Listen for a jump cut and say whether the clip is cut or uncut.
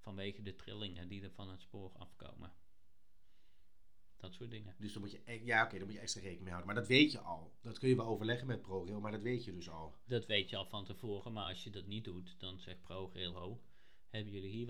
cut